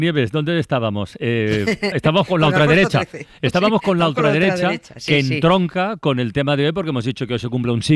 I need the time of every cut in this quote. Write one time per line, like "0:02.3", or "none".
0:01.9